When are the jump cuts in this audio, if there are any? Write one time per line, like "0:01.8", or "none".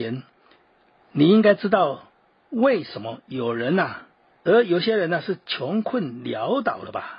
0:04.4